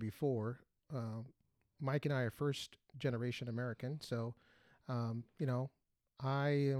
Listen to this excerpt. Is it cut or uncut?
uncut